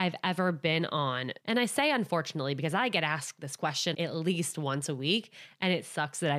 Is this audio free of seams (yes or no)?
no